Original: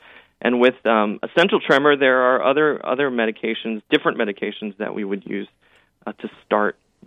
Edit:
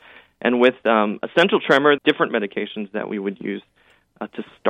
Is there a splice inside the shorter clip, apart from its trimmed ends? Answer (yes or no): yes